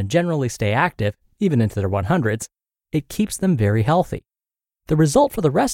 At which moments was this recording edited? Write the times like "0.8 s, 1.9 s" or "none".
none